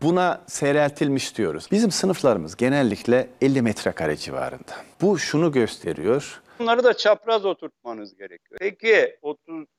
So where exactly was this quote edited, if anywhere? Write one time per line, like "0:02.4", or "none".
0:01.7
0:06.6